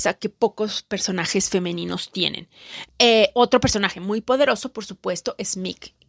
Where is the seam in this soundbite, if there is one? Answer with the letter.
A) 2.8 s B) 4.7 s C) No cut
A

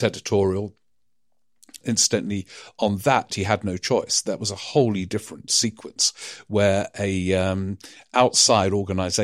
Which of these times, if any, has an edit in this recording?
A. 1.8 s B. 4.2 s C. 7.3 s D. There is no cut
A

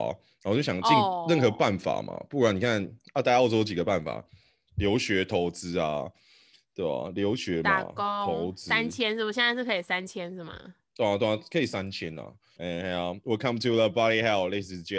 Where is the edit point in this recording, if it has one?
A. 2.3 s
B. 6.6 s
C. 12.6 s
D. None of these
C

